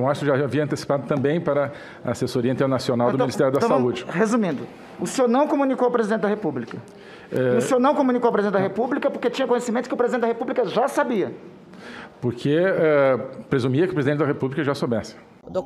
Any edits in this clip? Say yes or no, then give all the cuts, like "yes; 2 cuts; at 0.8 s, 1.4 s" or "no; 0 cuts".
no; 0 cuts